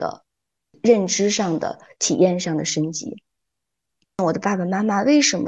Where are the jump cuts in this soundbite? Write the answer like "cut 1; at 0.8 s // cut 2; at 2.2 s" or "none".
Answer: none